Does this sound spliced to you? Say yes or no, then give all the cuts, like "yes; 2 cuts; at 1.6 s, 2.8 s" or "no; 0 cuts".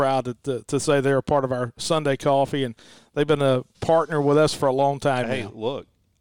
yes; 1 cut; at 3.7 s